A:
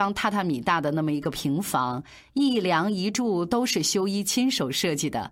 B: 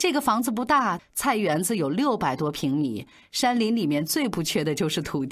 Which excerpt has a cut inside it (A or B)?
B